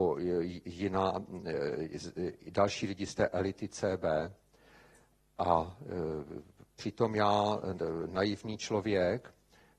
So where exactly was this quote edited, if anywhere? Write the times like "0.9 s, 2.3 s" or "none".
none